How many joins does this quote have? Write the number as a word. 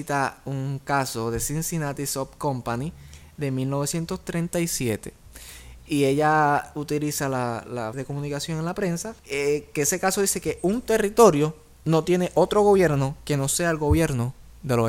two